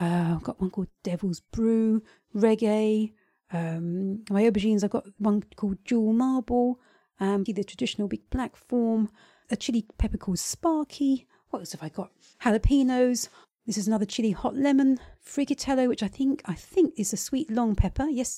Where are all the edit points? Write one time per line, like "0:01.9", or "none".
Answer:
0:07.5